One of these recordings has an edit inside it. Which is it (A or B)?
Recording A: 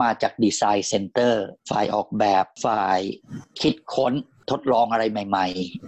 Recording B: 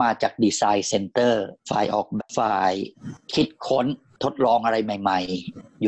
B